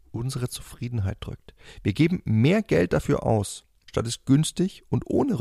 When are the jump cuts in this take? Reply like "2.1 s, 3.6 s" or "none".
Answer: 3.9 s